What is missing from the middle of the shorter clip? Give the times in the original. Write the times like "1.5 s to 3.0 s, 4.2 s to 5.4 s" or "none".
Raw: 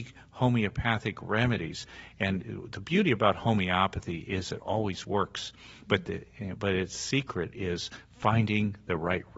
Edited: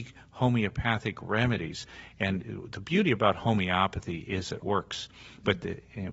4.6 s to 5.0 s